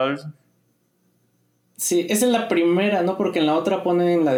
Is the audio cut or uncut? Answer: uncut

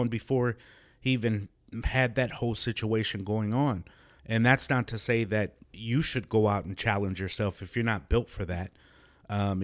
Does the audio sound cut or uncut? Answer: cut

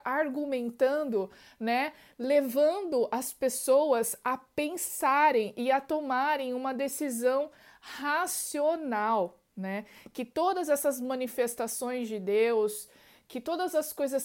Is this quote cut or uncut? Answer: uncut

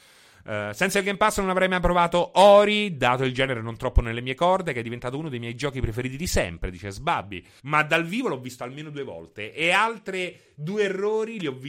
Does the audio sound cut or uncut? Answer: cut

